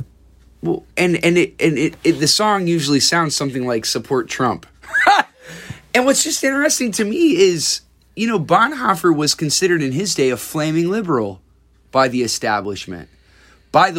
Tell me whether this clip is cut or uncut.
cut